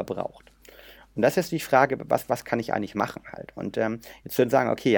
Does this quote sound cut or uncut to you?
uncut